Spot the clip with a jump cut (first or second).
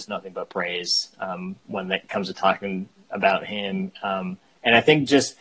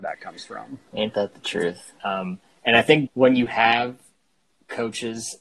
second